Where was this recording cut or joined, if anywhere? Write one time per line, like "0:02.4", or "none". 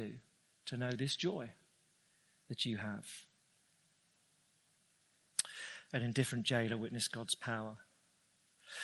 none